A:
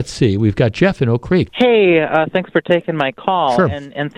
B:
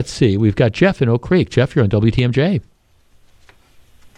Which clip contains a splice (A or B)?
A